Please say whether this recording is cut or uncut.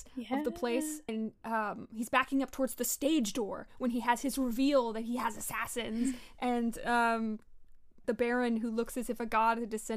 cut